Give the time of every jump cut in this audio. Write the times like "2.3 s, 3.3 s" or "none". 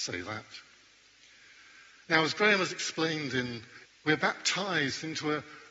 3.9 s